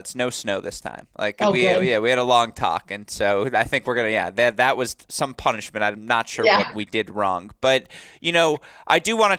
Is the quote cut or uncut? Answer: uncut